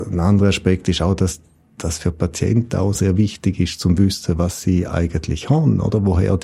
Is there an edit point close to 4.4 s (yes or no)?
no